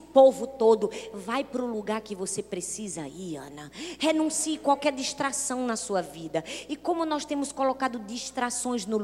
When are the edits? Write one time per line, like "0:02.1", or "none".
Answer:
0:04.0